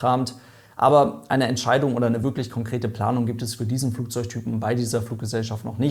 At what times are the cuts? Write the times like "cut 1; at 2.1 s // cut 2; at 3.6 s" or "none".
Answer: none